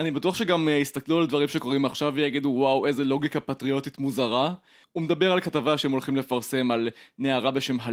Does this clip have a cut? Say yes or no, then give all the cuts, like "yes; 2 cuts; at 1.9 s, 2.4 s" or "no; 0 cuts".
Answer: yes; 1 cut; at 4.8 s